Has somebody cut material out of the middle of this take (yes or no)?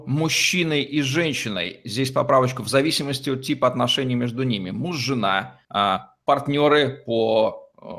yes